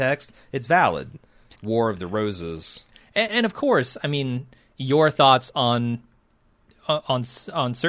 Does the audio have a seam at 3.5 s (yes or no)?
no